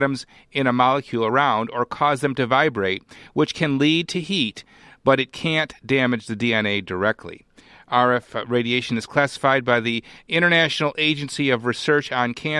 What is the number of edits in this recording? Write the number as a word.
zero